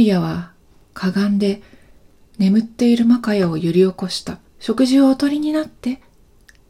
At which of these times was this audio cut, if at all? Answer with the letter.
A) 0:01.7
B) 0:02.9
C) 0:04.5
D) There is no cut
C